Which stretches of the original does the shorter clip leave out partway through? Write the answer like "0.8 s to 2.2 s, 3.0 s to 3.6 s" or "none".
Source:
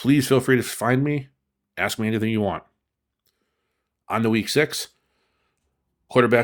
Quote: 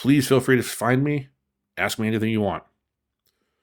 none